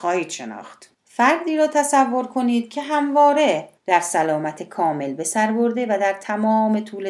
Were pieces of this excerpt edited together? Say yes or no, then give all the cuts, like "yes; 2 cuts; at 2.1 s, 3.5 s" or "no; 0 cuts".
yes; 2 cuts; at 0.9 s, 3.8 s